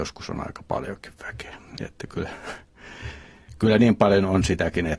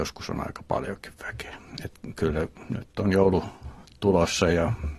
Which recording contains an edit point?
first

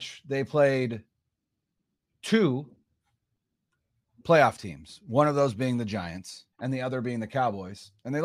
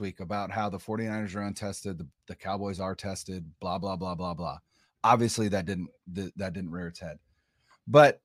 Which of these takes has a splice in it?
first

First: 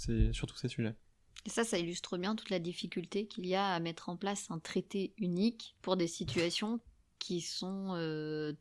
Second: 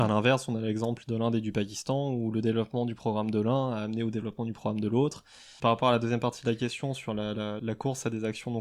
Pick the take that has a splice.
second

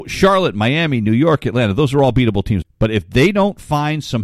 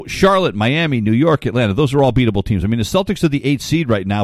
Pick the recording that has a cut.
first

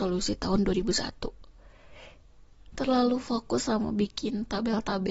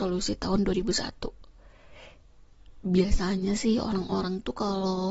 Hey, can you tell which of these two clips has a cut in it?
first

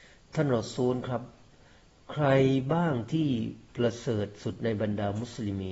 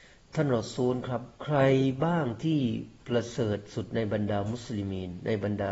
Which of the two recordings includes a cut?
second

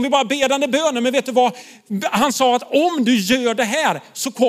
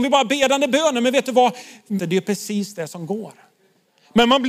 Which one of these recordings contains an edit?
second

